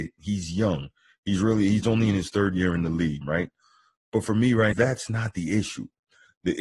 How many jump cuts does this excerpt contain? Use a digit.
2